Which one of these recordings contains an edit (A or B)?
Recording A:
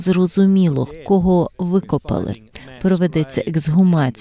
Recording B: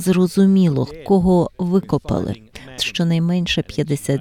B